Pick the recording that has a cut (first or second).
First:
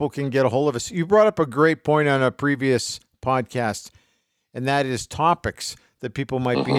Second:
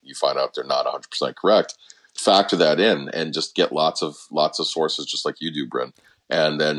second